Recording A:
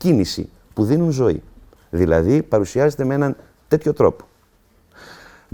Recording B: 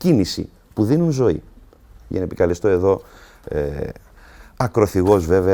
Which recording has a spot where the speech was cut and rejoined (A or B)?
A